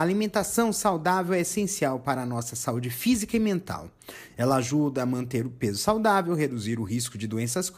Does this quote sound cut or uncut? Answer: uncut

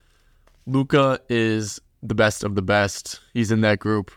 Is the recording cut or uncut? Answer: uncut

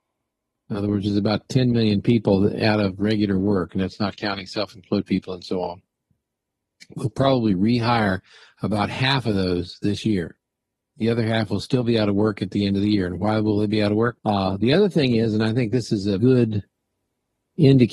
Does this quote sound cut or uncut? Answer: cut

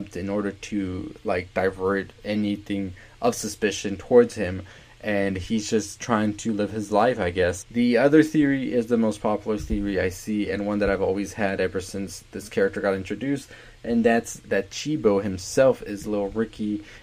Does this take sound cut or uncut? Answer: cut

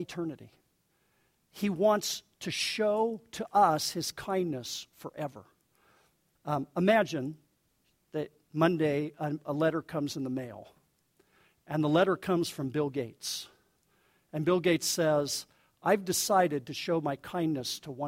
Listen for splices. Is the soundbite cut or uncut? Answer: uncut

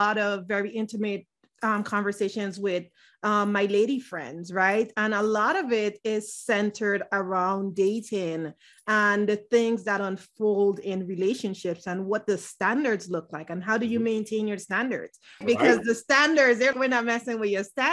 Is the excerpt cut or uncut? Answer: cut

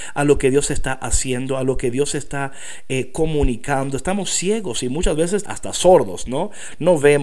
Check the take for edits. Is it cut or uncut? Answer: cut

